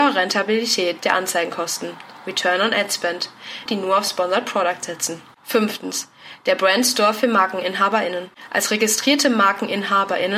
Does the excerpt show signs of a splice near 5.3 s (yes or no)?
no